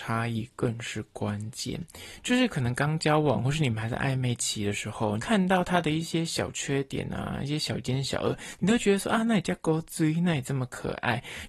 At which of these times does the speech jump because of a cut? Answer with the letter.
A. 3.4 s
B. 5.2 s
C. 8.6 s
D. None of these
B